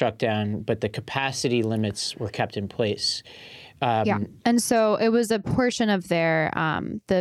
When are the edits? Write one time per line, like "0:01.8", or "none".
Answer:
0:04.4